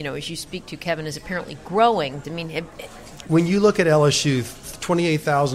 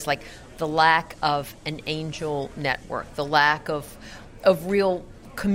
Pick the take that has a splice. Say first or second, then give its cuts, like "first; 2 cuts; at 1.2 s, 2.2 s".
first; 2 cuts; at 2.2 s, 3.3 s